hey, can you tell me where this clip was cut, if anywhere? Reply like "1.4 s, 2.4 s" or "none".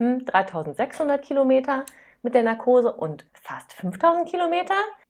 3.3 s